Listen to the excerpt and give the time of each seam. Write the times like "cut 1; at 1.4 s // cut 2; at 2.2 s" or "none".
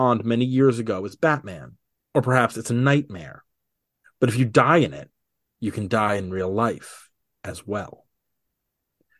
cut 1; at 2.0 s